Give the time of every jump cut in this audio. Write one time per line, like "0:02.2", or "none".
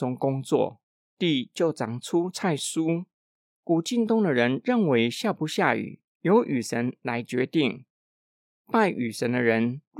0:03.5